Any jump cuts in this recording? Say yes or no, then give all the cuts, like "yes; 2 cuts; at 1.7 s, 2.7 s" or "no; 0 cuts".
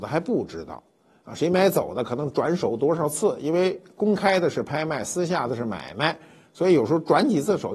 no; 0 cuts